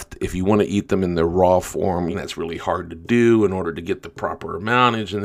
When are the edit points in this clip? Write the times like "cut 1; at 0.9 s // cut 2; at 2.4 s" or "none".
cut 1; at 2.1 s